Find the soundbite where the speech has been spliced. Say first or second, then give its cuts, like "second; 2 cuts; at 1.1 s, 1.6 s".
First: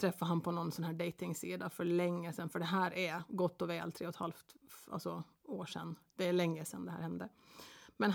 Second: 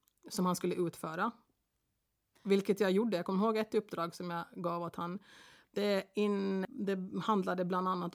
second; 1 cut; at 6.6 s